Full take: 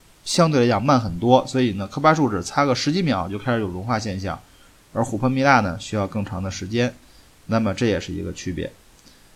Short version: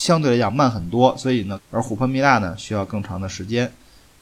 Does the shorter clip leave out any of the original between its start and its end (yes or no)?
yes